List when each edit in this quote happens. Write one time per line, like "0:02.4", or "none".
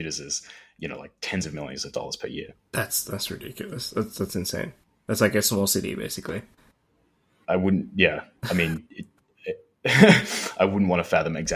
none